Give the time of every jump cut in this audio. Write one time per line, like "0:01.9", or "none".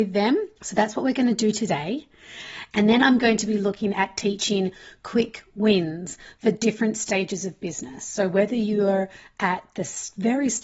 0:02.7